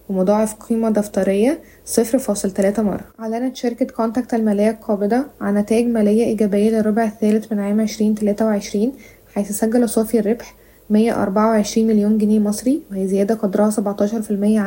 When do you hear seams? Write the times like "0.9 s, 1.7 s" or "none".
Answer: 3.1 s